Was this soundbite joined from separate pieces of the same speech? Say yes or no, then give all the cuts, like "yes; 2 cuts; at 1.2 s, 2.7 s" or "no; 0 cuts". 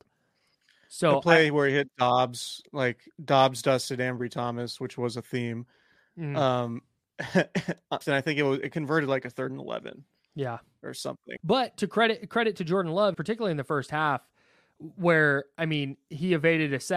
yes; 3 cuts; at 8.0 s, 11.4 s, 13.1 s